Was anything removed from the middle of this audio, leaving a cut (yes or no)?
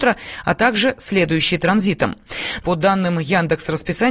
yes